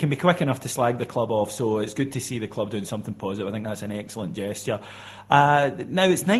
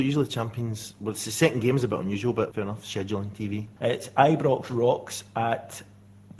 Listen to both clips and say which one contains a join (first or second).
second